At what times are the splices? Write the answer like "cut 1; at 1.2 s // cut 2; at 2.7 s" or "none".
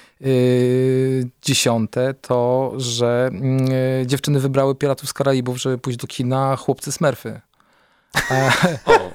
none